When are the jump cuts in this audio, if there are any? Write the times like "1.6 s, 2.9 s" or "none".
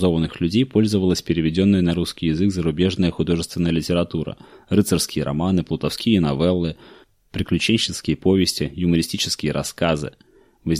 none